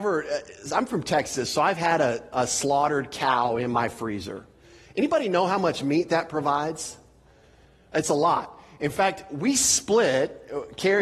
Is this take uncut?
yes; 0 cuts

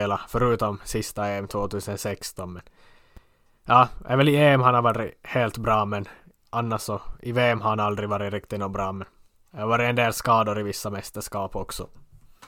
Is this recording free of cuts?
yes; 0 cuts

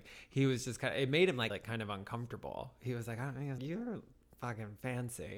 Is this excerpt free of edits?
no; 2 cuts; at 1.5 s, 3.6 s

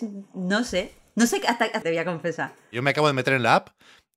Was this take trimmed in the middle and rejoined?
yes; 1 cut; at 1.8 s

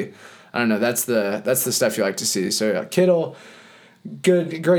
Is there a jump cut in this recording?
no; 0 cuts

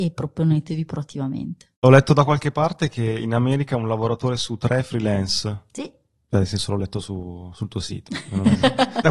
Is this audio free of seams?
yes; 0 cuts

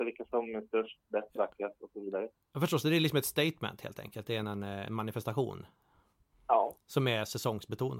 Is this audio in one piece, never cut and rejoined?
yes; 0 cuts

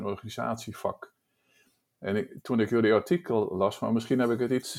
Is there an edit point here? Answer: no; 0 cuts

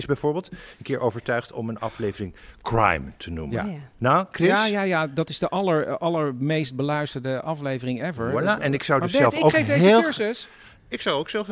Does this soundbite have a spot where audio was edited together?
no; 0 cuts

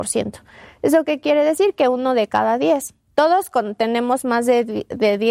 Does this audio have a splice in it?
no; 0 cuts

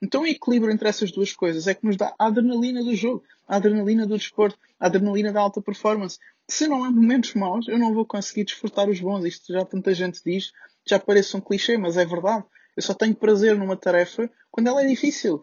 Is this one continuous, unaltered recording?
yes; 0 cuts

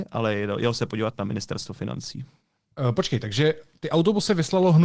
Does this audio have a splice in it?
no; 0 cuts

